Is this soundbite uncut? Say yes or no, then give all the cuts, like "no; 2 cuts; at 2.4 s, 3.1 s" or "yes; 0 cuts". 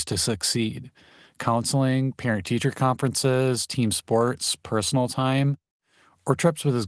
yes; 0 cuts